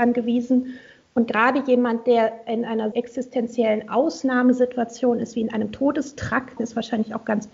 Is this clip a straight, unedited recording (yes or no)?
no